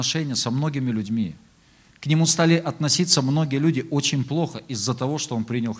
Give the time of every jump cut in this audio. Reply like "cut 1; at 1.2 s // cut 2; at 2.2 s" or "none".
none